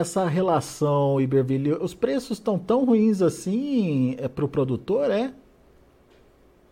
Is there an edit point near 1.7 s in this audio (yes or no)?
no